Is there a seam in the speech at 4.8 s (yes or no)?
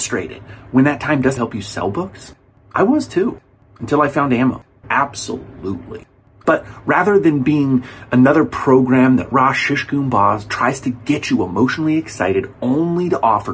yes